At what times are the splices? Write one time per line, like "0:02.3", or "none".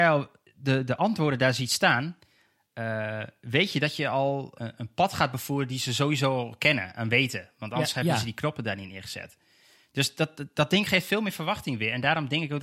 0:04.6